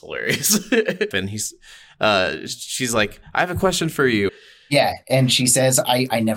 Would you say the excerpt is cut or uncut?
cut